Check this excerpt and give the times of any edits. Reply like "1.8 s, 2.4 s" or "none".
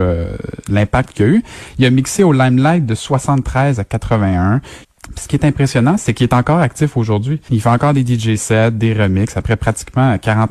4.8 s, 7.5 s